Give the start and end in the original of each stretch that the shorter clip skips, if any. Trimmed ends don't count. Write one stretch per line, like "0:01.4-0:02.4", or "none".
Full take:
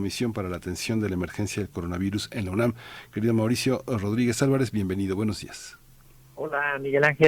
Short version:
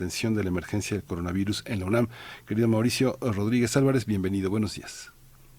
none